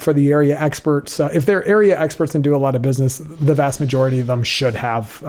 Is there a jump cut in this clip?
no; 0 cuts

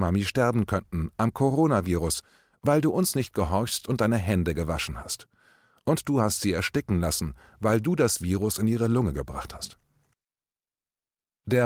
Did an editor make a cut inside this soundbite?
no; 0 cuts

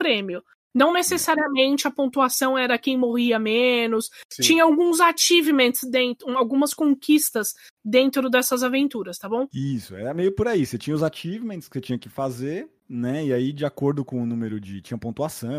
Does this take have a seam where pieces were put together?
no; 0 cuts

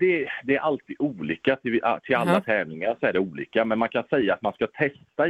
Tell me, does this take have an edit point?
no; 0 cuts

